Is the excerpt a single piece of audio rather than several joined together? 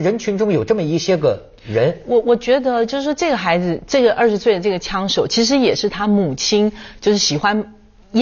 yes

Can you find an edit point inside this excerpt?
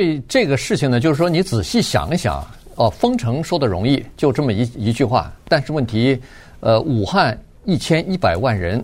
no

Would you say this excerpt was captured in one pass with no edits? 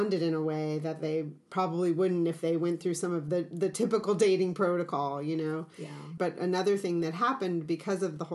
no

